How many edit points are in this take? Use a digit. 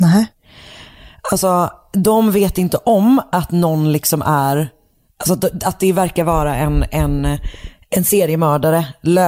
0